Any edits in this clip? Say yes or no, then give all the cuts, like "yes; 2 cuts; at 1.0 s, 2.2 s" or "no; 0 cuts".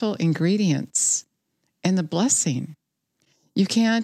no; 0 cuts